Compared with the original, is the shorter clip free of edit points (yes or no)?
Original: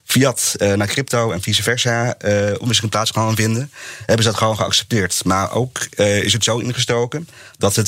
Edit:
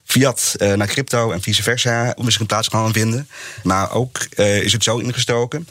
no